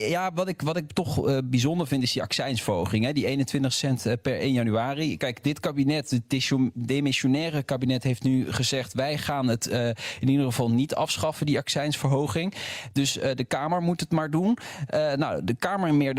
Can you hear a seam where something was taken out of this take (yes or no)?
no